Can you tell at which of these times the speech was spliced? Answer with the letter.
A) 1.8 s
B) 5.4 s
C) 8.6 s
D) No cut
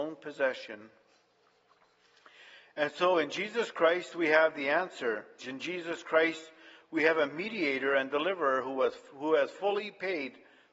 B